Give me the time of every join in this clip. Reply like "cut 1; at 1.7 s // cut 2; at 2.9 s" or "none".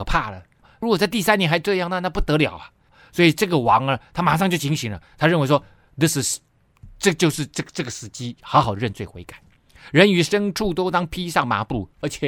none